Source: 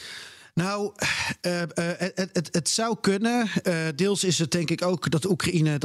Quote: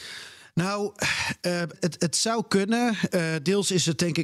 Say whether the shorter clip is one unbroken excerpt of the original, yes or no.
no